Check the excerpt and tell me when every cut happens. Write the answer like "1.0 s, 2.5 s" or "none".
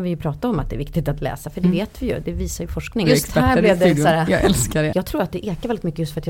3.0 s, 4.9 s